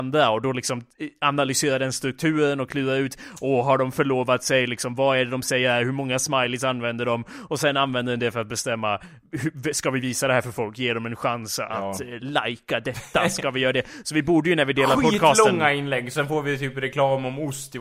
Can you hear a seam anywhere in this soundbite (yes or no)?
no